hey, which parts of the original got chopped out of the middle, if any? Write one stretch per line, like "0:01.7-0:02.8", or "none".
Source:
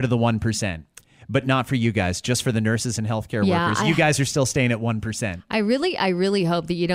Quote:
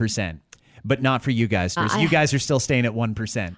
0:02.2-0:03.6